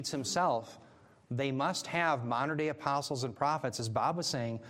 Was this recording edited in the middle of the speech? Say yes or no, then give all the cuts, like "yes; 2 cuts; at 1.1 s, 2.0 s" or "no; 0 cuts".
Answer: no; 0 cuts